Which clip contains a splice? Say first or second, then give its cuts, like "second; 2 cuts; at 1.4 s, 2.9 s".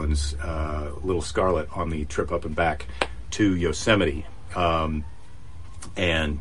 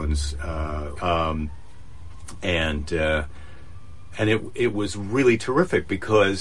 second; 1 cut; at 0.9 s